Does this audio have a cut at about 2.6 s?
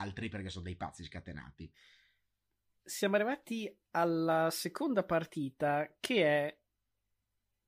no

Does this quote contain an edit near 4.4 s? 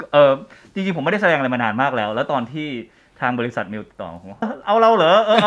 yes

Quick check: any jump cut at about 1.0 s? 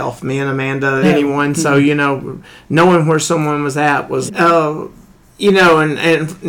yes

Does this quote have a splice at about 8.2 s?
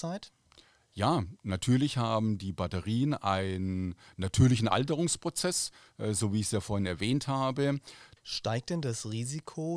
yes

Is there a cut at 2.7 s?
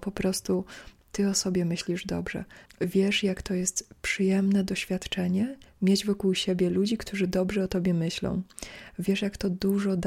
yes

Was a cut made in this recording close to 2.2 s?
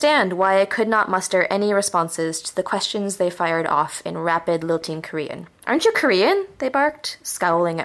no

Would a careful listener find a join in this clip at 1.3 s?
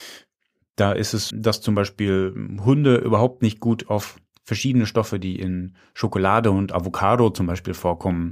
yes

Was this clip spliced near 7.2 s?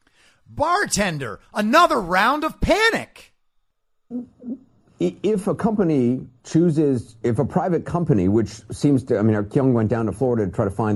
yes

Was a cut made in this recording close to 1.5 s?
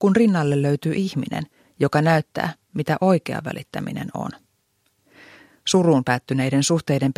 no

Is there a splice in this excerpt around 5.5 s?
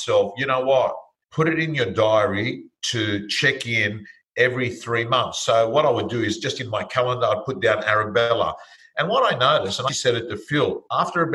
no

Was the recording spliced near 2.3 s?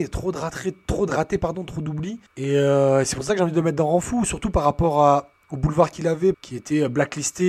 yes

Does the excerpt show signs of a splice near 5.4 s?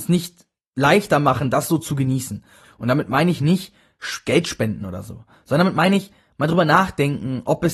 no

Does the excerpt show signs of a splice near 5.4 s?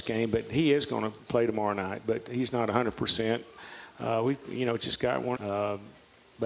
yes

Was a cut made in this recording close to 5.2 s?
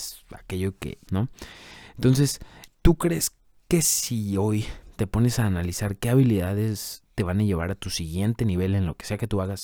no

